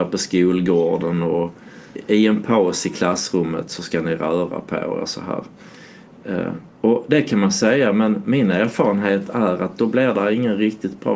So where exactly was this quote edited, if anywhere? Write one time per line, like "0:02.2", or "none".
0:06.7